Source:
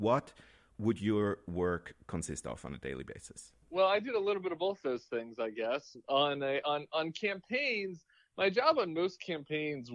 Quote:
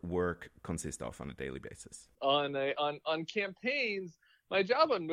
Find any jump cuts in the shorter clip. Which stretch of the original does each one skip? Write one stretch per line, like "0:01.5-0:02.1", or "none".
0:03.6-0:06.0

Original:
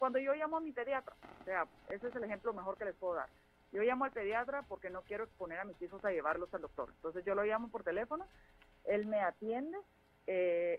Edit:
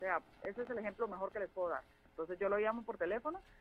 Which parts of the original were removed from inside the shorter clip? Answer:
0:03.5-0:06.9

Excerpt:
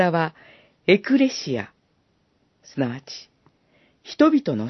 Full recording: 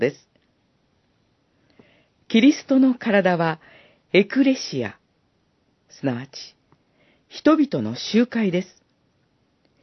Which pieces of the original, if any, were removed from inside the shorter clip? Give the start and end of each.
none

